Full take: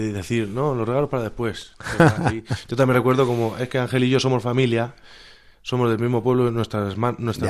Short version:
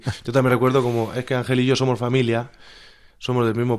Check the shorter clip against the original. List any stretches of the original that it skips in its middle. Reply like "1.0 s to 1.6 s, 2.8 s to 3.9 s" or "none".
none

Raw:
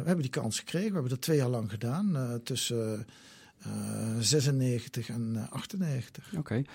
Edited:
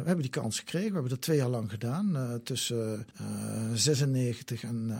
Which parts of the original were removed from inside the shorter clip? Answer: 3.1 s to 3.6 s

